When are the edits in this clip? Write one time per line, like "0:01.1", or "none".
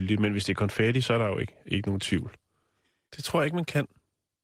0:03.1